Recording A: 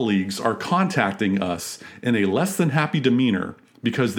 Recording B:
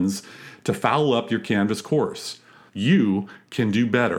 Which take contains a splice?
B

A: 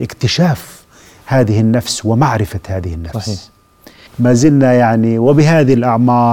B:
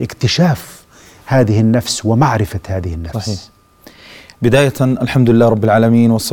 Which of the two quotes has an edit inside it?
A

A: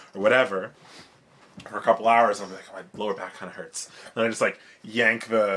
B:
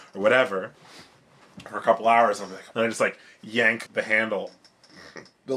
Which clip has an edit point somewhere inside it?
B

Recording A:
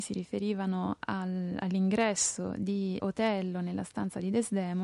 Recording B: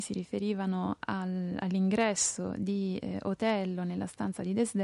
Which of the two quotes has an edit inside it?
A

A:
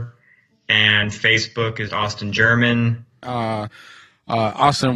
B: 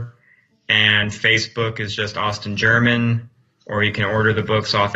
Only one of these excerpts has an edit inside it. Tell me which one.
A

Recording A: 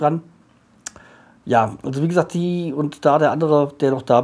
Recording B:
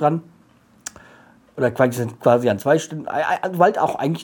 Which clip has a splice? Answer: A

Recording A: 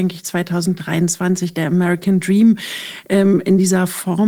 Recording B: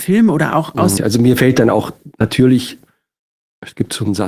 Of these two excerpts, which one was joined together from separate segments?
B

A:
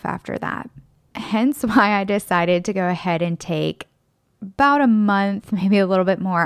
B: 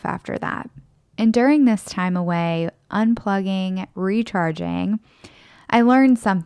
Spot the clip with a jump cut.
B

